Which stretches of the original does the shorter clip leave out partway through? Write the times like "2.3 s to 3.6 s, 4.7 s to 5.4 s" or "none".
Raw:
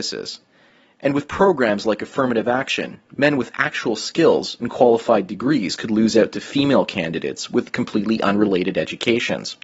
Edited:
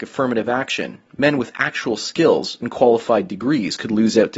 none